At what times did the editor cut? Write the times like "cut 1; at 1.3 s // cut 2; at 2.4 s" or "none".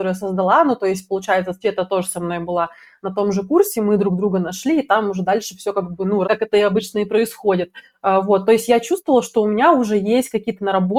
cut 1; at 6.2 s